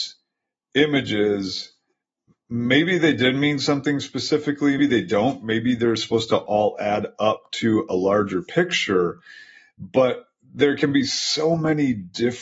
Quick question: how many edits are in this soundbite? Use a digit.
1